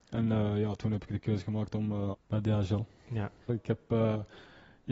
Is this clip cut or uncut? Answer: cut